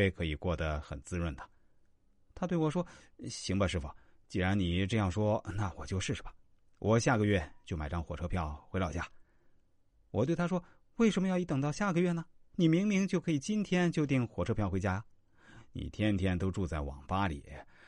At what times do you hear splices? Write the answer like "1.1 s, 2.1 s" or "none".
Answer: none